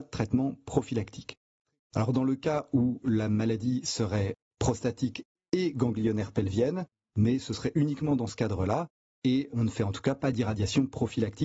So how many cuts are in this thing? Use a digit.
1